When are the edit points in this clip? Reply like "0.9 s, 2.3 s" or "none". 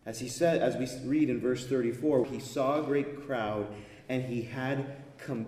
2.2 s